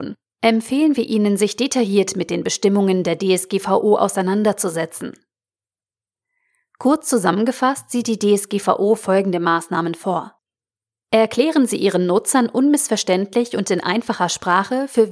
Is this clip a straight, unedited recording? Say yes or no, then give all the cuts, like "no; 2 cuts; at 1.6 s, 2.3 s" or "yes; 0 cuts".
yes; 0 cuts